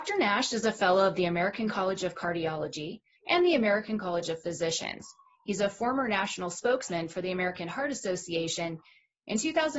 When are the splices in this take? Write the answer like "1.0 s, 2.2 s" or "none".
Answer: 3.2 s